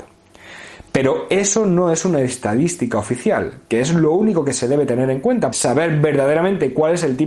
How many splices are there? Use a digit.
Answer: 2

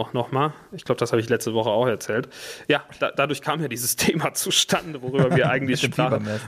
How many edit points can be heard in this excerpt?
0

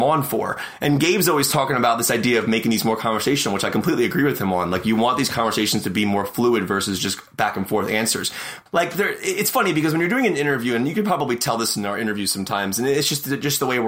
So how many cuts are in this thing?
1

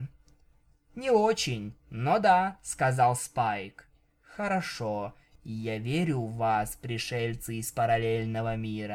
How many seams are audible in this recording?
0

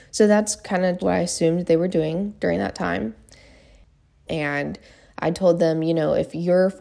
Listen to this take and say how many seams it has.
2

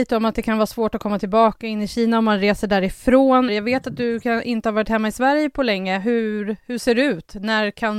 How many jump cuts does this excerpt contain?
1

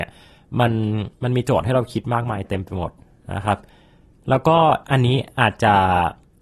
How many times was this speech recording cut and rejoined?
1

